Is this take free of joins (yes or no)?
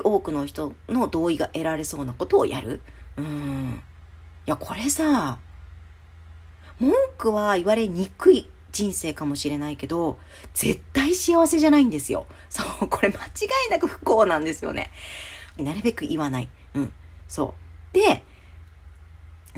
no